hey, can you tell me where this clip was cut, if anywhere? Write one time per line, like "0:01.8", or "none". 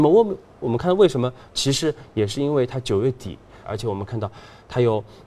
0:01.5
0:03.6